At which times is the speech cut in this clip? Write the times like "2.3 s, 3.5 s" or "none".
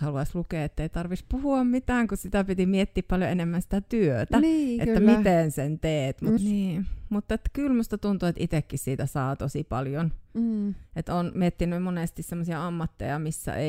6.4 s